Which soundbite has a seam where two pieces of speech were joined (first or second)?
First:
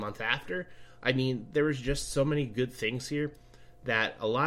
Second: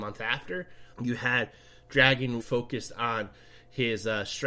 second